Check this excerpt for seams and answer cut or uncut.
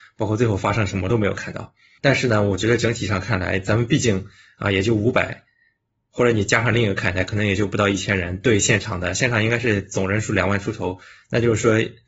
uncut